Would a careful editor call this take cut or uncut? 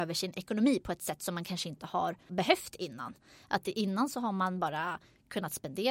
uncut